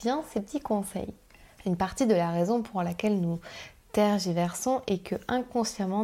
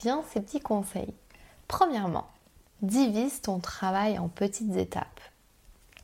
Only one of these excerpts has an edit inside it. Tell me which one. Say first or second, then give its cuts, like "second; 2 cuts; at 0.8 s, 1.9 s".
first; 1 cut; at 1.6 s